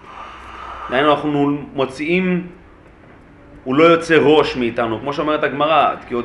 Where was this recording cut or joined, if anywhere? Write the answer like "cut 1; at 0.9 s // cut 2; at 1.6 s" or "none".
none